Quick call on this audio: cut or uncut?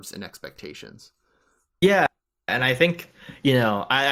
uncut